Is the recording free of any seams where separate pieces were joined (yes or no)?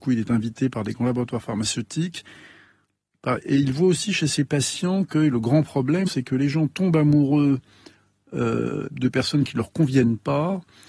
no